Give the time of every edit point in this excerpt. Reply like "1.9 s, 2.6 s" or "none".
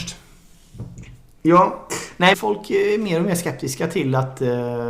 2.3 s